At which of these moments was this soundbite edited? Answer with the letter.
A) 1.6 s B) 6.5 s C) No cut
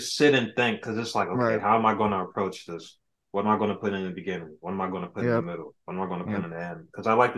C